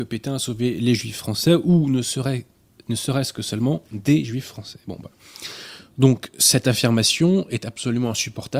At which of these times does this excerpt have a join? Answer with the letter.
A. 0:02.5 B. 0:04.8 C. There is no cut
C